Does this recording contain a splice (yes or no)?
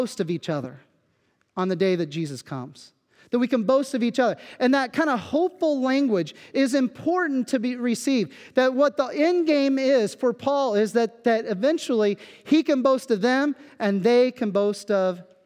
no